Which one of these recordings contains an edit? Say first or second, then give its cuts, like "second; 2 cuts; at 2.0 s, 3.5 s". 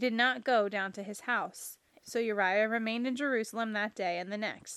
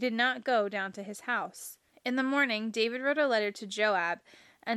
first; 1 cut; at 2.0 s